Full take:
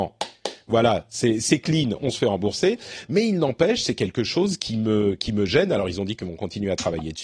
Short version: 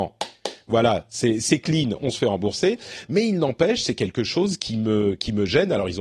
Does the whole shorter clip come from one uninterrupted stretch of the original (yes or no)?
yes